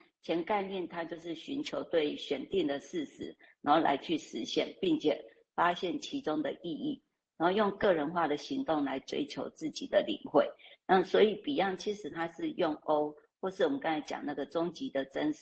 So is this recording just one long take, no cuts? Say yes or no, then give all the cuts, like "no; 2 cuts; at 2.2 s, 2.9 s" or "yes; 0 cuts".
yes; 0 cuts